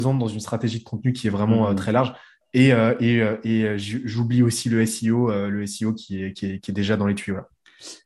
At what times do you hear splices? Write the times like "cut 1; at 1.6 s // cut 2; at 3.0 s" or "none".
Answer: none